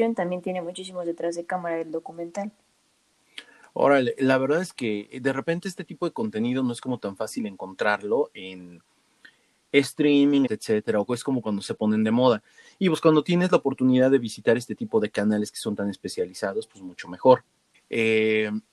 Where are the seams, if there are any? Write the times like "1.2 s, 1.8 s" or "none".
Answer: 10.5 s, 17.7 s